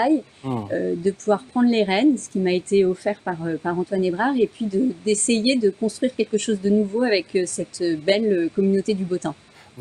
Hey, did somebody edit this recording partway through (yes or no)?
no